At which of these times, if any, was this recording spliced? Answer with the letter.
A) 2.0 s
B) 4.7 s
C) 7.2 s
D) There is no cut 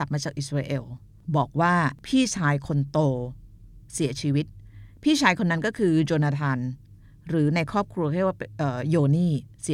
A